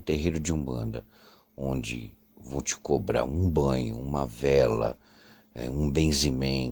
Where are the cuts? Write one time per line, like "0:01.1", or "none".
none